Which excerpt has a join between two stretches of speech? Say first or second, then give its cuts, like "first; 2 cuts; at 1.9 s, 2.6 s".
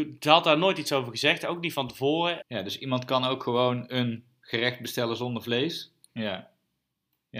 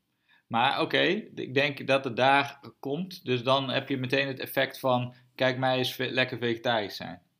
first; 2 cuts; at 2.4 s, 6.1 s